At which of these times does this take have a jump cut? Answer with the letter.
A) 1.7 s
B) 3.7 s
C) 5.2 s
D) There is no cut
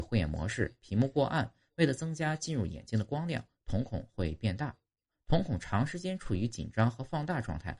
D